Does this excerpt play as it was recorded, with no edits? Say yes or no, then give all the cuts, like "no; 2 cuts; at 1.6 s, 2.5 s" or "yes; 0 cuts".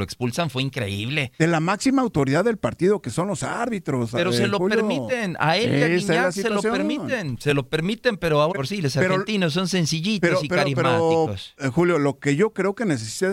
no; 1 cut; at 8.5 s